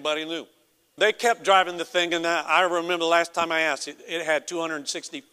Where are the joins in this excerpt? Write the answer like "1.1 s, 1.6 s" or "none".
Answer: 1.0 s

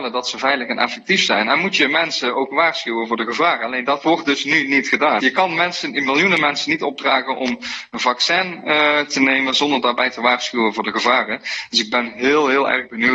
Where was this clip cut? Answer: 5.2 s

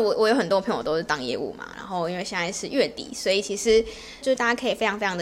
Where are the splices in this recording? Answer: 4.2 s

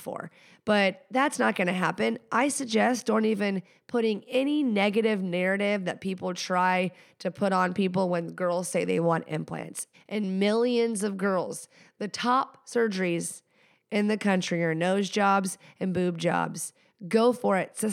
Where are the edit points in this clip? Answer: 9.9 s

